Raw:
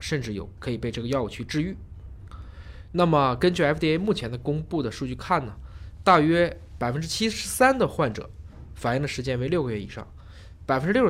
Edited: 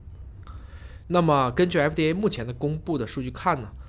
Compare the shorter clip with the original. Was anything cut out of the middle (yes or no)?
no